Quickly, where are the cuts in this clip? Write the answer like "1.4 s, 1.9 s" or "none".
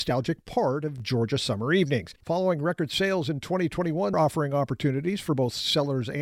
2.2 s, 4.1 s

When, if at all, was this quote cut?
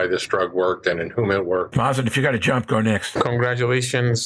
none

